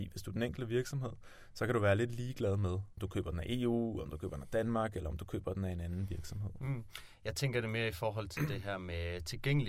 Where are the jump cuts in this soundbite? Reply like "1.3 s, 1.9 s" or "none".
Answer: none